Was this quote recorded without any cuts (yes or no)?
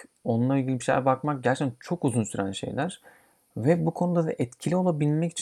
yes